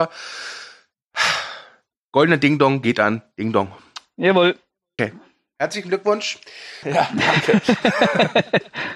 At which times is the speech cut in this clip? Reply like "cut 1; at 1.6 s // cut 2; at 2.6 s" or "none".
cut 1; at 5.0 s // cut 2; at 6.8 s